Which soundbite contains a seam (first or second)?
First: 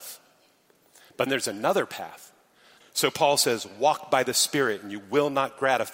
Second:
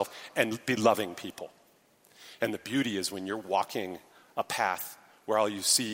first